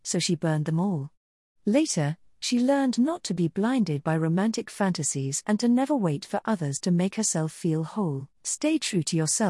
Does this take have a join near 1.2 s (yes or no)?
no